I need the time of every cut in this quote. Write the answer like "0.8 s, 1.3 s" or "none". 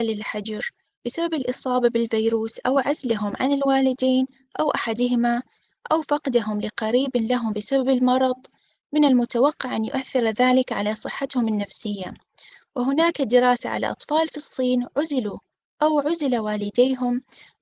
12.6 s